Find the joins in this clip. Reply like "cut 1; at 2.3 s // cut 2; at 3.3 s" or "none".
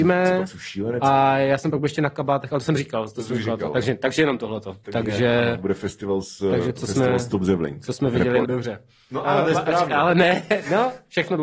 cut 1; at 8.4 s